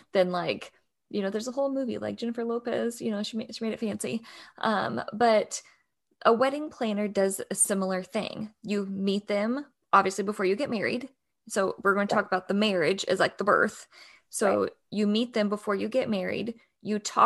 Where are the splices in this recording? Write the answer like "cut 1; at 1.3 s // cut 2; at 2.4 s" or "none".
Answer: none